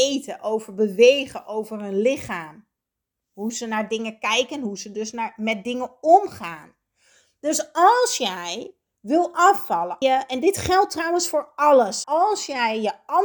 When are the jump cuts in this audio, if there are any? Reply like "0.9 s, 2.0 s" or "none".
10.0 s, 12.0 s